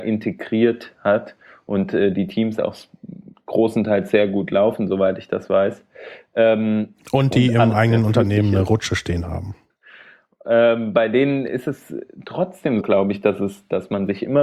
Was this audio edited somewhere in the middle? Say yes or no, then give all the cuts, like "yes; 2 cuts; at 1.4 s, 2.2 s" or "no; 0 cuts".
yes; 2 cuts; at 9.7 s, 12.8 s